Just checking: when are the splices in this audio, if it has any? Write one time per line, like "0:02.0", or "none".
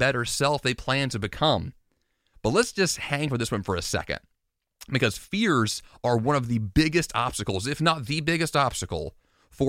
0:02.3